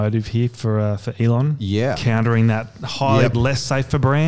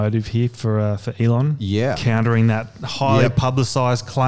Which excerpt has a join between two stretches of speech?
first; 1 cut; at 3.3 s

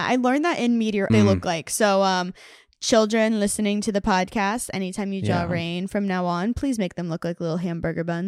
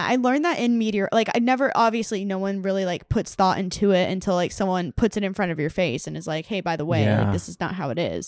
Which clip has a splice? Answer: first; 1 cut; at 1.1 s

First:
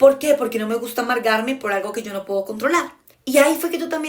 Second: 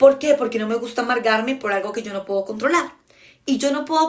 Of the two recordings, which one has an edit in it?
first; 1 cut; at 3.1 s

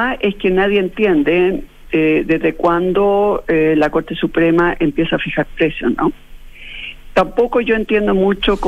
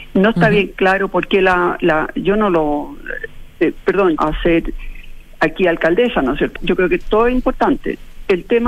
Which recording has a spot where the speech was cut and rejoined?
second; 2 cuts; at 4.2 s, 6.6 s

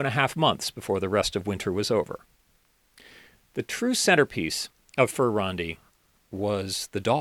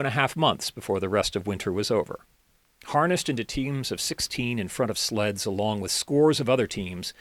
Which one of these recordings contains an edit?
second; 1 cut; at 2.8 s

